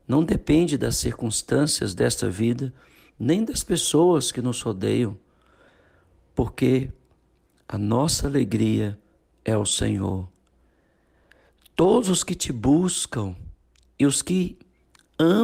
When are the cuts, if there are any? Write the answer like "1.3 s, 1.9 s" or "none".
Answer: none